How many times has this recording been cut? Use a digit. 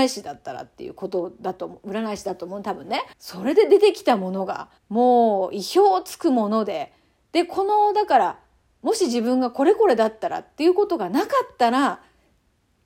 2